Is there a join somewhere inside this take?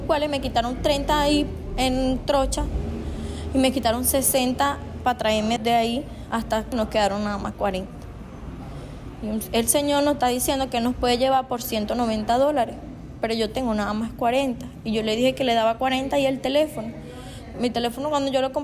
yes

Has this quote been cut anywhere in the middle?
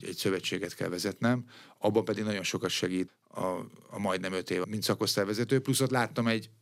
yes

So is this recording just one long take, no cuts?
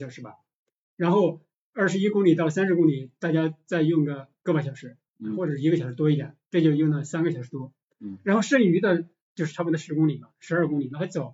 no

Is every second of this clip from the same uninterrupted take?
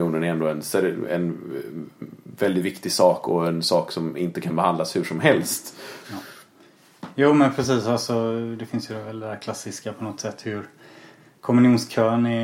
no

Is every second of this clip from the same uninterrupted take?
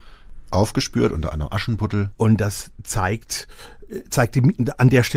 no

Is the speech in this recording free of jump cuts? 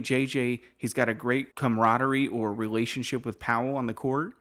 no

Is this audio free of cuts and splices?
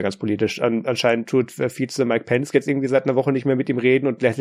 yes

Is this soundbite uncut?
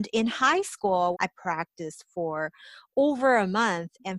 no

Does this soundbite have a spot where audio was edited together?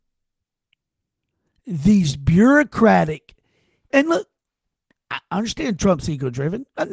yes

